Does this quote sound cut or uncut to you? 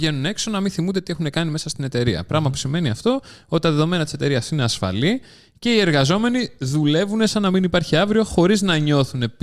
uncut